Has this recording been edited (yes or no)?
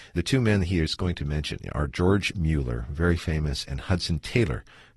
no